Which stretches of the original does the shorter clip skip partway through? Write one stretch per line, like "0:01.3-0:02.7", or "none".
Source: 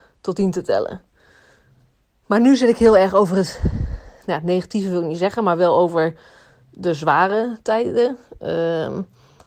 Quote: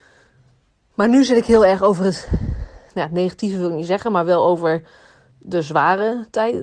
none